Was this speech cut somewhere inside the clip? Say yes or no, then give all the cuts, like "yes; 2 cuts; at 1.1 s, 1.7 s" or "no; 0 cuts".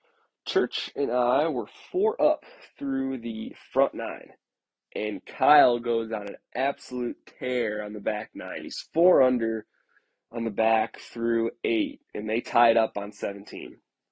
no; 0 cuts